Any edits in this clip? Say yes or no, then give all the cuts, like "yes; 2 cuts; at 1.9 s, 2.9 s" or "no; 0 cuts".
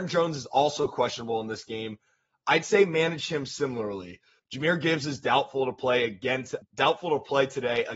yes; 2 cuts; at 4.4 s, 6.6 s